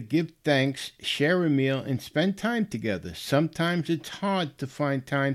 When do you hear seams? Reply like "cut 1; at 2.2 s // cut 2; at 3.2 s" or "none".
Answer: none